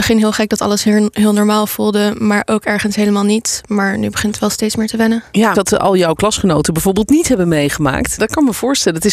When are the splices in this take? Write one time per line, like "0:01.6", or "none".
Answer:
0:05.5
0:08.2